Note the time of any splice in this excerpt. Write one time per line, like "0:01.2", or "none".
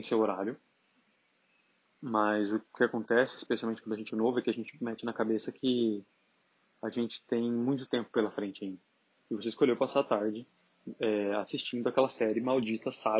0:04.1
0:09.2